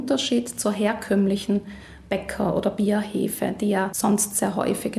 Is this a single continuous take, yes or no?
yes